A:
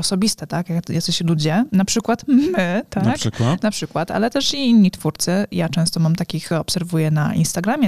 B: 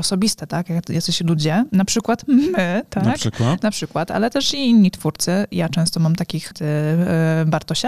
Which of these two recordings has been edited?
B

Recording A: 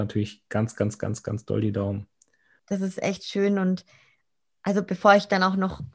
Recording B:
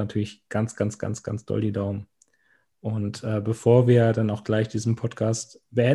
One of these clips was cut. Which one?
A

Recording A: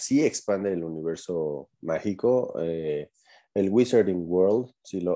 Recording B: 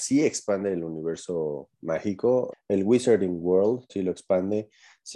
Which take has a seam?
B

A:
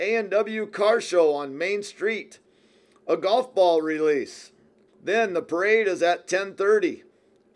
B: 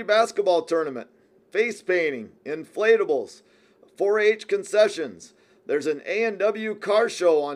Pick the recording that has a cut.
A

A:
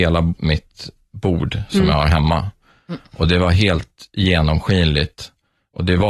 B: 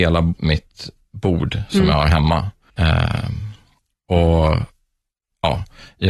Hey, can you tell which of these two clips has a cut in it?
B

